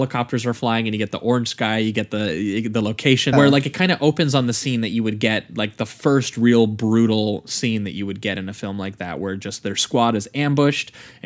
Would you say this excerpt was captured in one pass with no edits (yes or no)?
no